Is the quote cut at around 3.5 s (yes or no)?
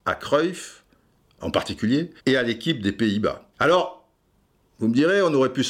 yes